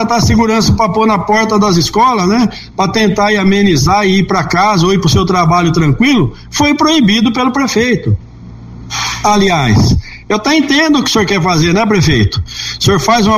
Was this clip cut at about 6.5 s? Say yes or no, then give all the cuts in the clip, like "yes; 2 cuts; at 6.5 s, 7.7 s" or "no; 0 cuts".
no; 0 cuts